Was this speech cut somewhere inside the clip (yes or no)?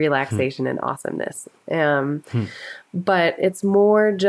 no